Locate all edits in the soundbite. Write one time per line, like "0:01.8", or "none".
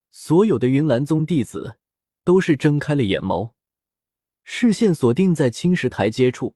none